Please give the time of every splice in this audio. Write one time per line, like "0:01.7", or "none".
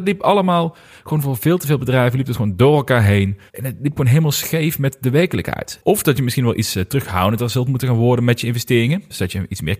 0:03.5
0:05.8